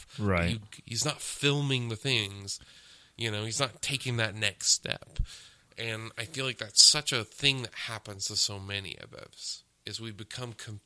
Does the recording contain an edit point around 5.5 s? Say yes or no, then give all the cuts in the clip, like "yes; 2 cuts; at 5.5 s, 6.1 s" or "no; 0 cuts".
no; 0 cuts